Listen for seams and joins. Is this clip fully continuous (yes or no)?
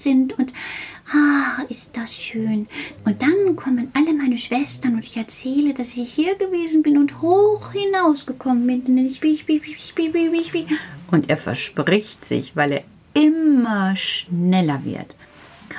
no